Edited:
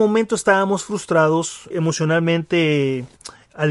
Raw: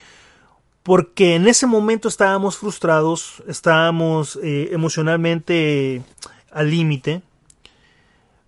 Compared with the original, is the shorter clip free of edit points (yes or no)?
no